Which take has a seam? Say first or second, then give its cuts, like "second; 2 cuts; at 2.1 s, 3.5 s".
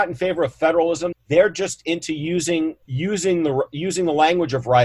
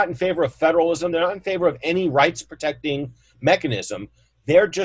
first; 2 cuts; at 1.1 s, 2.8 s